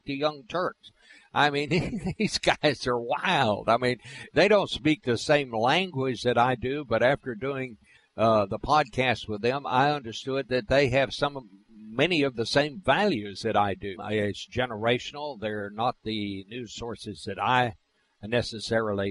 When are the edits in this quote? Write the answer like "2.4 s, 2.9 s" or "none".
14.0 s